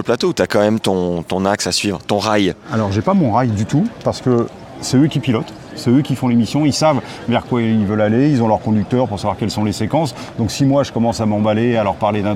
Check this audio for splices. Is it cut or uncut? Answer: uncut